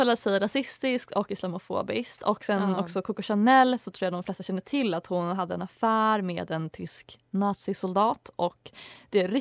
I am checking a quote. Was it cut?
no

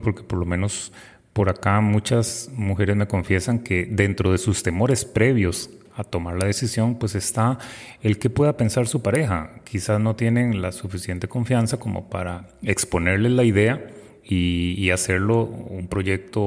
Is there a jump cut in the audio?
no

